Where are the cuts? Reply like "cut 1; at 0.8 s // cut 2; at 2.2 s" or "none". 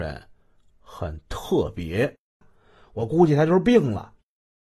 cut 1; at 2.4 s